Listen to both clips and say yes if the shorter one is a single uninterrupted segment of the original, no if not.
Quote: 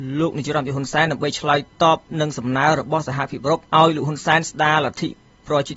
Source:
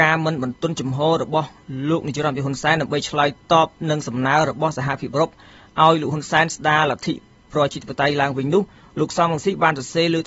no